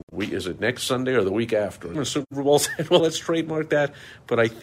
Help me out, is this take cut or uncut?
cut